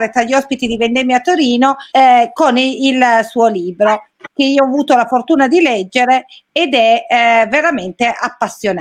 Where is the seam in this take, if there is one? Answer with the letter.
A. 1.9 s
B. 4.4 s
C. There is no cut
A